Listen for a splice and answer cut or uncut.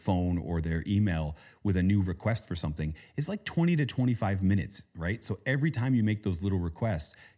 uncut